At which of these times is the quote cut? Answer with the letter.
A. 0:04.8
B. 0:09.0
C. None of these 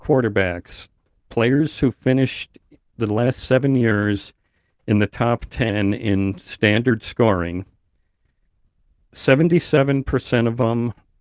C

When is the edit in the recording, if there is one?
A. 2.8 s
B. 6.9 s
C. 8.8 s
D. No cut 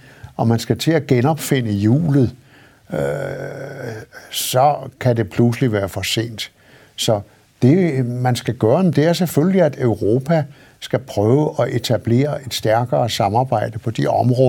D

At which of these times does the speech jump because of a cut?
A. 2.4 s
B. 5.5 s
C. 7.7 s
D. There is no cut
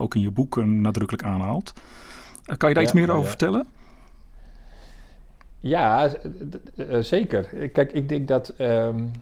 D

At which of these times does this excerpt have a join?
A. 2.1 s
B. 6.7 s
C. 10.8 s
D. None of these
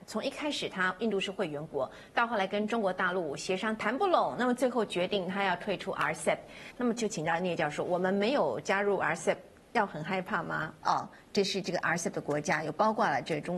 C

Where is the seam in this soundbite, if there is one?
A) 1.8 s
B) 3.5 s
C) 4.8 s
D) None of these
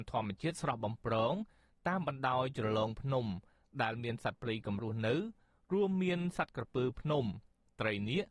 C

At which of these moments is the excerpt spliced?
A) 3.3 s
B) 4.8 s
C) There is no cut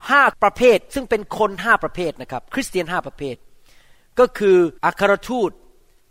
B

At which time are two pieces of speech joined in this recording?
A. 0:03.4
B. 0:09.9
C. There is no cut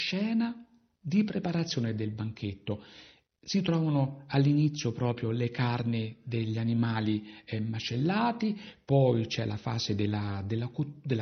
C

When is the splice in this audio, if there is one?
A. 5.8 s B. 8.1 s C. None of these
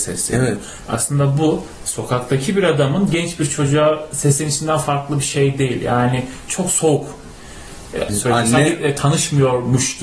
B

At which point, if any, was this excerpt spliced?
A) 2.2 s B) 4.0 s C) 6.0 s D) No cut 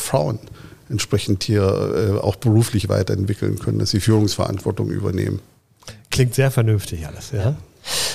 D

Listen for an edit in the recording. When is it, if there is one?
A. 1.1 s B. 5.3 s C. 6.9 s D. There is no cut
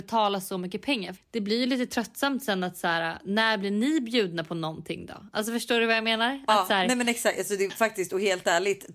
A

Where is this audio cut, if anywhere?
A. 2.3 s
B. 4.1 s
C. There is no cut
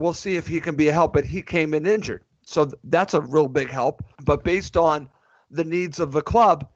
B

